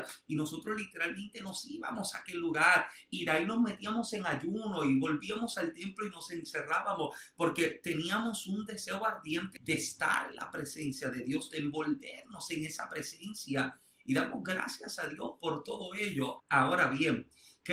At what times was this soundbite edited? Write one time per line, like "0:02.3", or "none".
0:09.6
0:16.4